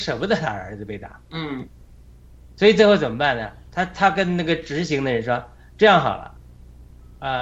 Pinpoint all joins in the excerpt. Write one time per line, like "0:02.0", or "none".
0:03.7